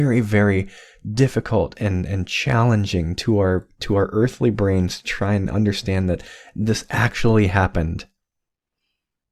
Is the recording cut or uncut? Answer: uncut